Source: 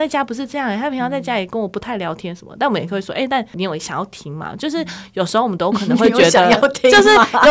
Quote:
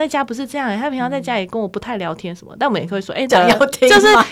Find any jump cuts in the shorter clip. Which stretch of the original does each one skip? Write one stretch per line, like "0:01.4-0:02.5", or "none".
0:03.3-0:06.3